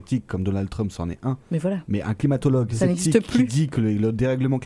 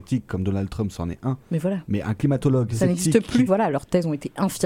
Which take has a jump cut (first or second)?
second